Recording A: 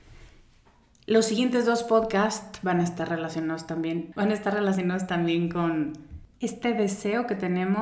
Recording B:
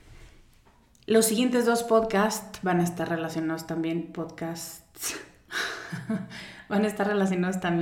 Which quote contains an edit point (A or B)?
A